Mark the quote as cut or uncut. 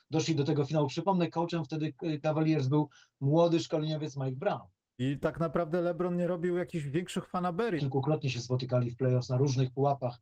cut